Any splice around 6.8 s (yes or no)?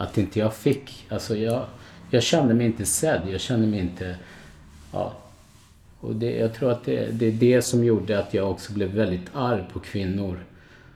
no